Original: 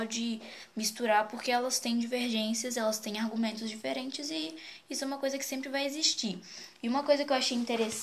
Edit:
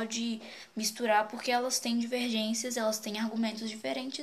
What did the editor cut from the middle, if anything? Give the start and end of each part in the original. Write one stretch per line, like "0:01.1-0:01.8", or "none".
none